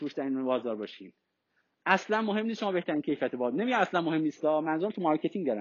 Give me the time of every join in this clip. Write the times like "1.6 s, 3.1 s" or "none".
none